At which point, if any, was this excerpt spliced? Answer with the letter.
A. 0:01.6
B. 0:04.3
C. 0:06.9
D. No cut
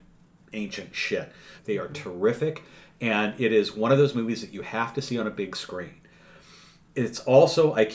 A